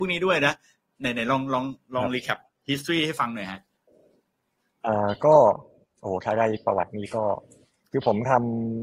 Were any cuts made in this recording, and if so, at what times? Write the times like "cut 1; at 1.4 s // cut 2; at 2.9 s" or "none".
none